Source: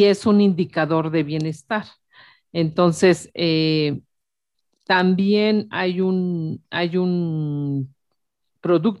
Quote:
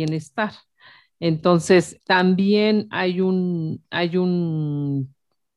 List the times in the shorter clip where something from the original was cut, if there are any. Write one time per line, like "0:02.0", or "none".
0:02.0